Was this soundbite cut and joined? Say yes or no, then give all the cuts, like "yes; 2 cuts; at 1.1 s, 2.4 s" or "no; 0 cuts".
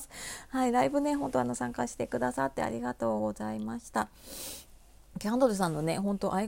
no; 0 cuts